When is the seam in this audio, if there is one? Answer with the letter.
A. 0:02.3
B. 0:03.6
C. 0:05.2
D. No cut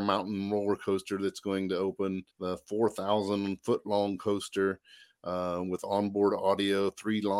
A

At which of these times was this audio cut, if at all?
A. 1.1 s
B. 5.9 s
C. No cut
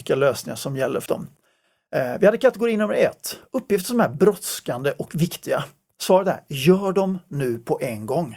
A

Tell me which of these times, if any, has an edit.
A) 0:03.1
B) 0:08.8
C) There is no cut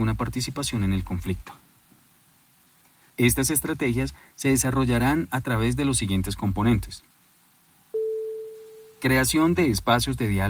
A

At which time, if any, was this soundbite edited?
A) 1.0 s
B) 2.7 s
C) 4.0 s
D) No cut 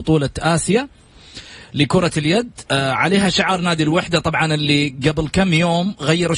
B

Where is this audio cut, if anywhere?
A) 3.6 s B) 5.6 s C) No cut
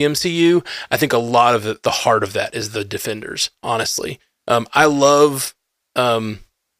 A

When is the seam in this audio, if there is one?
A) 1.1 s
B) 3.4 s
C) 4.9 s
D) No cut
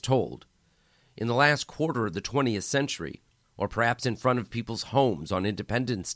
B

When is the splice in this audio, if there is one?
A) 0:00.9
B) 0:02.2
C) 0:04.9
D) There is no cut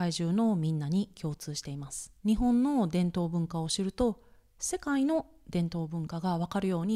B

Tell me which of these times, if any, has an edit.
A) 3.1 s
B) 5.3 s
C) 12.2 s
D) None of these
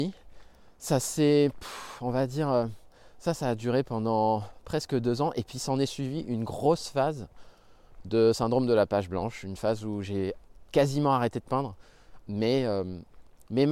C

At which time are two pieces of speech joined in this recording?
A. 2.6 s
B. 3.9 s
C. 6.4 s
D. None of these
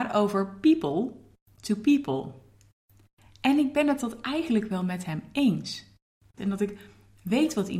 C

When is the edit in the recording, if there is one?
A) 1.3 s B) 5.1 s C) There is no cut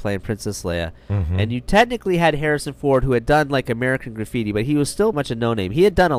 B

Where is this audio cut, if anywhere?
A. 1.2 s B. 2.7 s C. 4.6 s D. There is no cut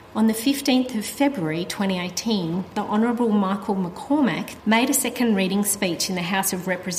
C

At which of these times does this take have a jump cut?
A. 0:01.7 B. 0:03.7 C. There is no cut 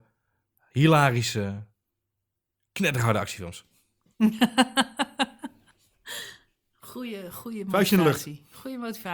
C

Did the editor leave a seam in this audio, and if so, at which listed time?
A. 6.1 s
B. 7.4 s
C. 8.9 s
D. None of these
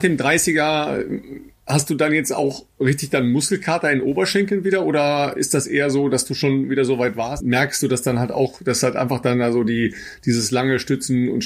B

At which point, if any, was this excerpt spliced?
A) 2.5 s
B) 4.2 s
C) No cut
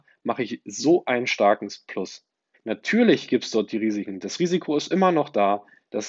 A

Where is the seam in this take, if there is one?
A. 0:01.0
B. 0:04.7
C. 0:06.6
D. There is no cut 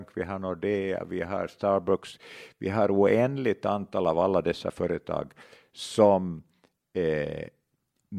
D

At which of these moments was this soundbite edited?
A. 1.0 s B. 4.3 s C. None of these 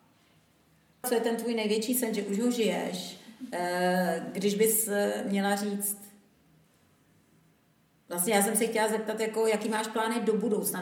A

